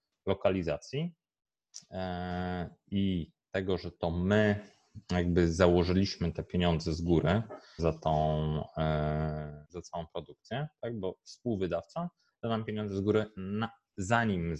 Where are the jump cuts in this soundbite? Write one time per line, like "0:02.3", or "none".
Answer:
0:07.8
0:09.6